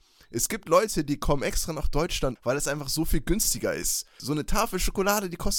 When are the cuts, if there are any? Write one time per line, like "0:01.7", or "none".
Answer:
0:02.4
0:04.2

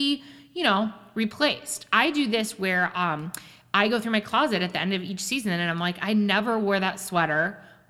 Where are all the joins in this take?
none

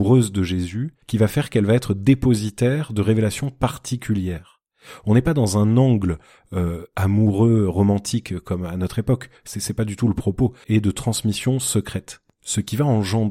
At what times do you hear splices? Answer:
0:01.0
0:10.6

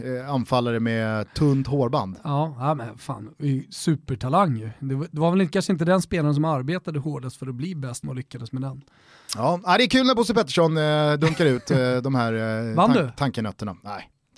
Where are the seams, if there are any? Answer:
0:08.0

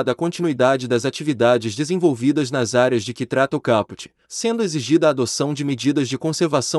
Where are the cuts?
0:04.2

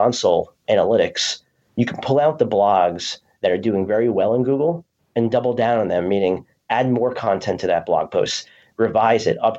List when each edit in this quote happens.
none

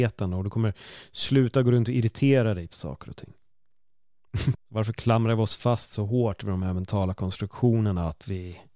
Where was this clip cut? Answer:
0:04.5

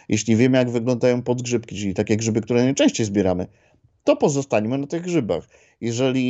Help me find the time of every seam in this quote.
none

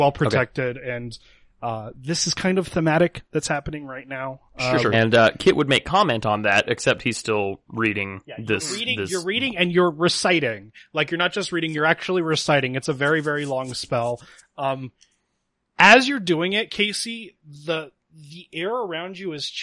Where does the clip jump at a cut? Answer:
0:04.9

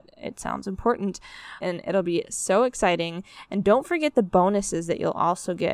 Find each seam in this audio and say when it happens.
0:01.6

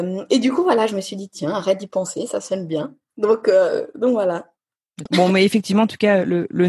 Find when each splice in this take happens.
0:05.1

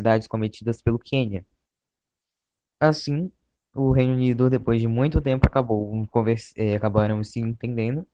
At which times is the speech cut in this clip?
none

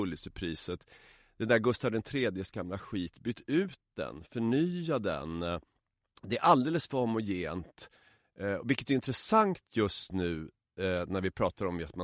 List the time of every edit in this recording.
none

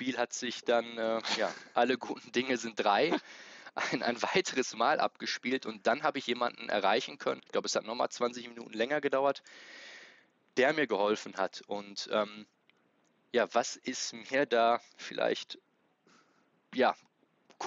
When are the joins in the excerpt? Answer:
0:07.4

